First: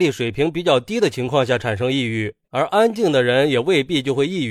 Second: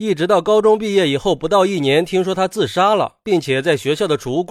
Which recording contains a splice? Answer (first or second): first